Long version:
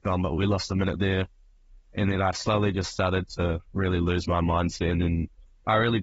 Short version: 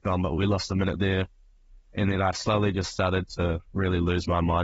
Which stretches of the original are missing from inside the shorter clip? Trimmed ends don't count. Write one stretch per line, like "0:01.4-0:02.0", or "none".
none

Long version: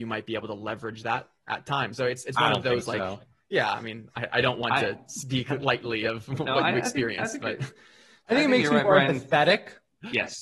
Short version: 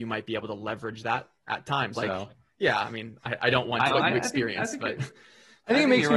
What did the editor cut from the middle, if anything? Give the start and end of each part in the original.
0:01.9-0:02.9
0:04.8-0:06.5

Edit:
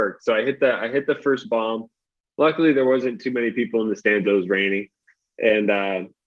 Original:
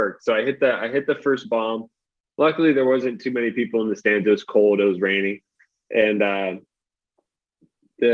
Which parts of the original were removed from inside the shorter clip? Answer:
0:04.2-0:04.8

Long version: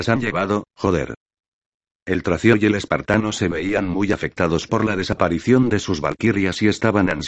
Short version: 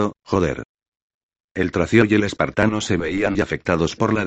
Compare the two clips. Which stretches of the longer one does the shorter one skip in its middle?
0:03.9-0:04.1

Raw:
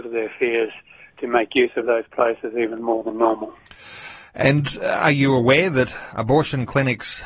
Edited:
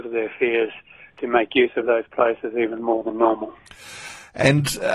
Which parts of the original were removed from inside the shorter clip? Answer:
none

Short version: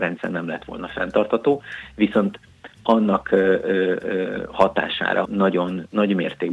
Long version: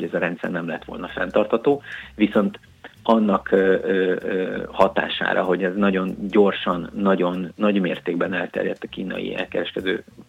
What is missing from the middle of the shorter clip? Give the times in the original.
0:05.4-0:06.9

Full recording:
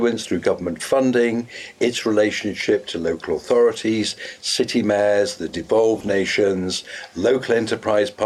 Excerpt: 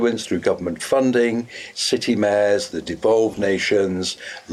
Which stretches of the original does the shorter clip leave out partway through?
0:01.7-0:04.4

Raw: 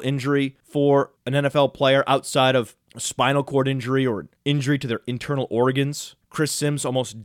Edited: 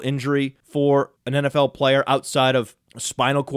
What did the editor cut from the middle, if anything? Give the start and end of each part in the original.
none

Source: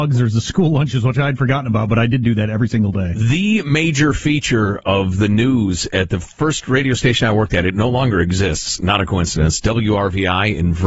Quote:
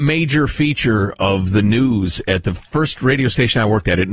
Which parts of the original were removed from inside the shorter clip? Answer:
none

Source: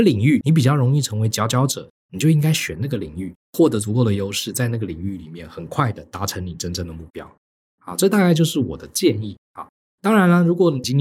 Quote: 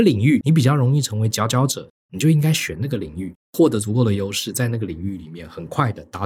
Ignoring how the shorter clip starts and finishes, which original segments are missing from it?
none

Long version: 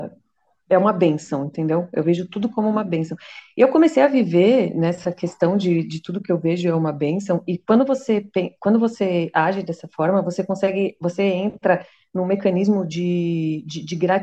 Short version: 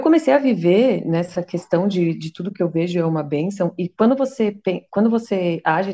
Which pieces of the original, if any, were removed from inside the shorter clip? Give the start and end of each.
none

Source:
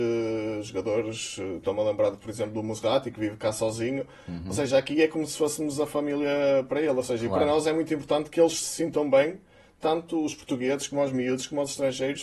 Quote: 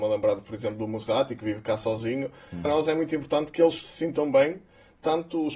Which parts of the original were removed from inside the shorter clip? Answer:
0:04.4-0:07.4

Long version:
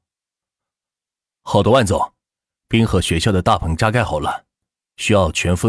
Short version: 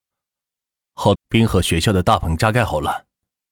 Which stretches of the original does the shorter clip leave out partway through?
0:01.6-0:02.5

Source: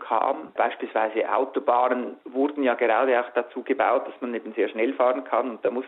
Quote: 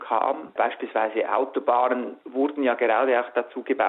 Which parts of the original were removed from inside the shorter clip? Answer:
none

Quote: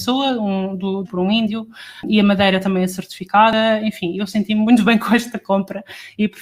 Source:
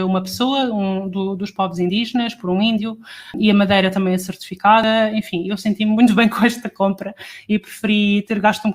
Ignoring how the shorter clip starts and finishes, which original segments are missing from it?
0:01.4-0:02.4

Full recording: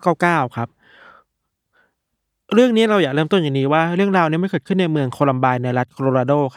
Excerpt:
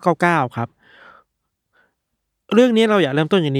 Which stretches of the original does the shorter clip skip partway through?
none

